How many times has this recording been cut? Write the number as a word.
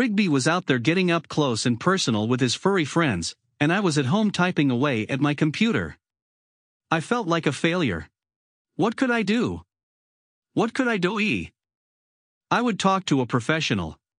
two